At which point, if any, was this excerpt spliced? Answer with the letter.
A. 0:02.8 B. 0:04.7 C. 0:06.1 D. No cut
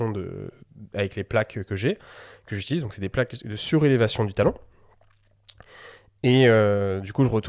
D